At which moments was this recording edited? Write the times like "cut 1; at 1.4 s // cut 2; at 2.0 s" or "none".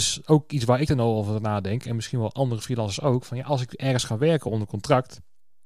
none